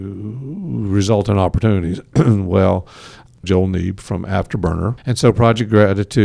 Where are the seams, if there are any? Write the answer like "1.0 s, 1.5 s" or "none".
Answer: 3.4 s, 5.0 s